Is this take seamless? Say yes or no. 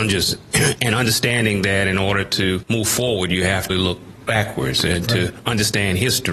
no